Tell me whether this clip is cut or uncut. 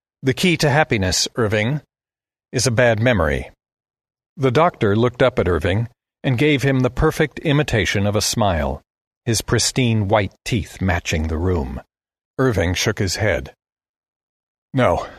cut